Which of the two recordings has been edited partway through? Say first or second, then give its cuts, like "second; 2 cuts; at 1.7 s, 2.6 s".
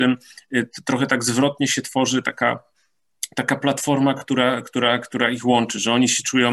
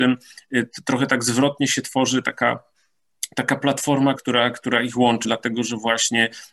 second; 2 cuts; at 4.2 s, 5.2 s